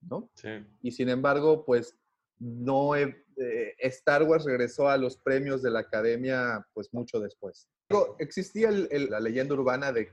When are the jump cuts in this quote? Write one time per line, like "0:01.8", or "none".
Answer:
0:07.9
0:09.1